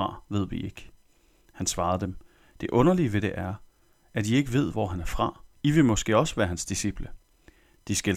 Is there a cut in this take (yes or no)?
yes